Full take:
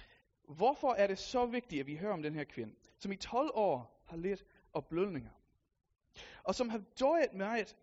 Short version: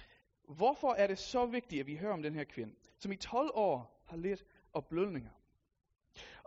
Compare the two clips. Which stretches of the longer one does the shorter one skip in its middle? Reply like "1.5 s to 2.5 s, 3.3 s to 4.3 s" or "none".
none